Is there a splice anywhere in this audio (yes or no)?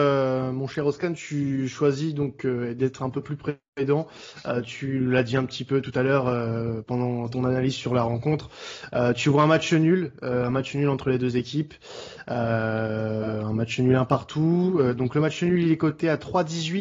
no